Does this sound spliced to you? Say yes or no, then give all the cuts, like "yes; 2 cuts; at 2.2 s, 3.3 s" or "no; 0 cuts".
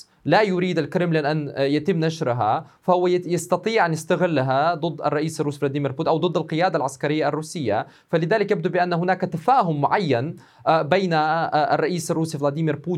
no; 0 cuts